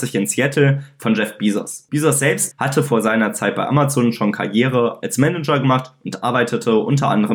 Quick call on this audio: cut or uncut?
cut